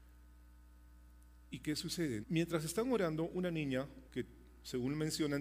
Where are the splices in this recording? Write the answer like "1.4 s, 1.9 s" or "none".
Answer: 2.2 s, 4.1 s